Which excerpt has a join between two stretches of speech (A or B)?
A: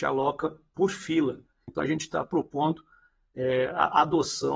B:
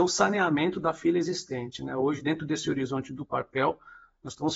A